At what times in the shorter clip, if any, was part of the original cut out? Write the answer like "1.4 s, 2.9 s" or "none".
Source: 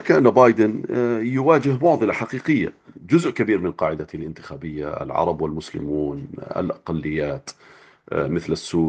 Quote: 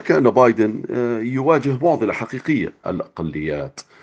2.8 s